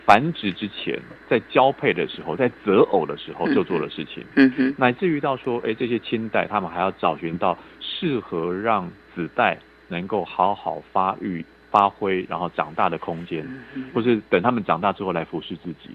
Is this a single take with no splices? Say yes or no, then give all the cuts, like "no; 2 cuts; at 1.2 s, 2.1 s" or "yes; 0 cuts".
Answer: no; 1 cut; at 13.9 s